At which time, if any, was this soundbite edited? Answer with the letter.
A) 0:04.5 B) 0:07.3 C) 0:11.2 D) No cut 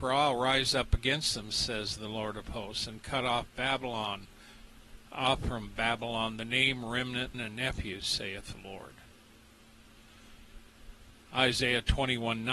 B